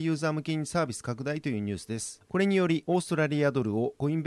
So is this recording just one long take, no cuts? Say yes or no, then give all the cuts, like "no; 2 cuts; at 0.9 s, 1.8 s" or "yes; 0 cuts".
no; 1 cut; at 2.3 s